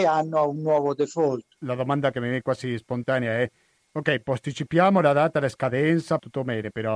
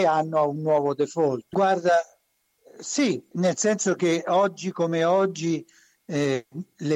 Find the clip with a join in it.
second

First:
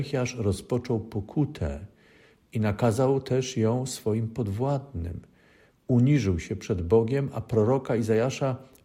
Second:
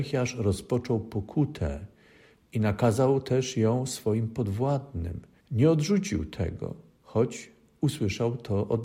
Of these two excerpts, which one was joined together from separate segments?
second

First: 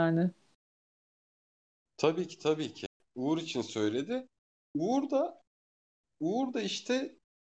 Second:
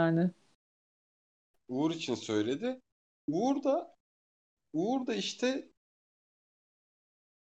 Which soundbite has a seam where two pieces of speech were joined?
second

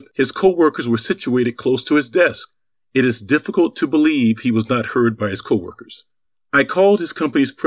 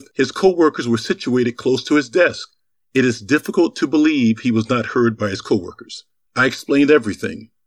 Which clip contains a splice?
second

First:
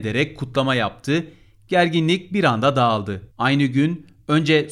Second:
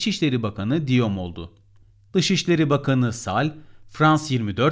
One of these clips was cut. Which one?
first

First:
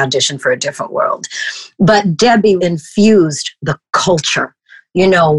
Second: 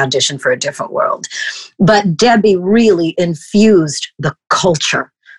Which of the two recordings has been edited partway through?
first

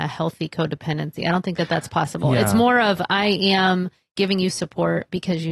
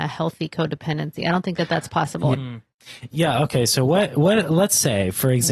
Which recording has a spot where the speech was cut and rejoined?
second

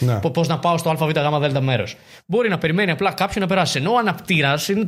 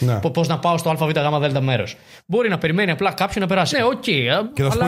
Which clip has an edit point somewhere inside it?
second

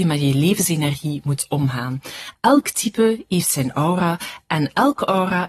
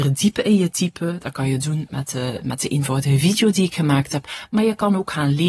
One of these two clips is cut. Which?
first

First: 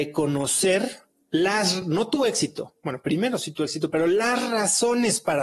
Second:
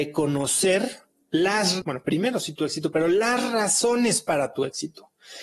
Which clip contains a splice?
second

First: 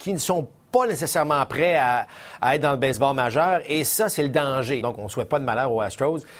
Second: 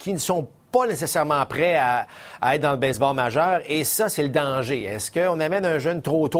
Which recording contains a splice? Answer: first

